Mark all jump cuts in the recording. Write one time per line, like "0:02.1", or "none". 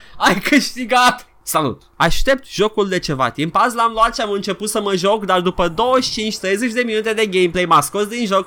none